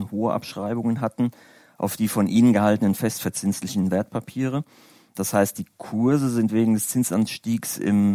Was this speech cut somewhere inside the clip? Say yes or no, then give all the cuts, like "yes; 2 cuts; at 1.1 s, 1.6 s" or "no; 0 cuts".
no; 0 cuts